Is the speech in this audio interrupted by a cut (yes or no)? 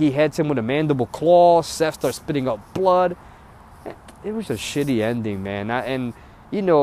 yes